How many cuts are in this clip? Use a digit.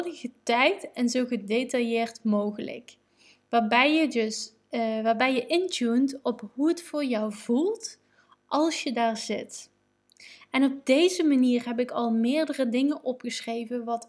0